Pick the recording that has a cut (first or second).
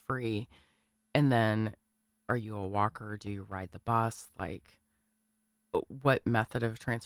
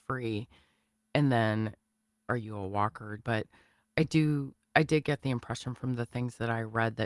second